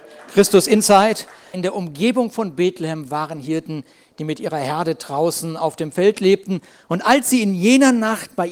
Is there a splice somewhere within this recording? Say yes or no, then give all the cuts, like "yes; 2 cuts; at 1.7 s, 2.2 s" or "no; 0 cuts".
yes; 1 cut; at 1.5 s